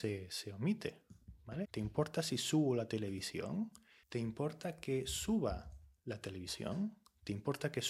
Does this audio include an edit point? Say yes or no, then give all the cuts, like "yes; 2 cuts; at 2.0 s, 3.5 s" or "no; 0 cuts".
yes; 2 cuts; at 1.6 s, 4.0 s